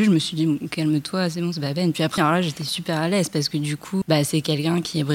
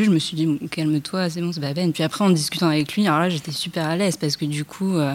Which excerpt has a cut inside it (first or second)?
first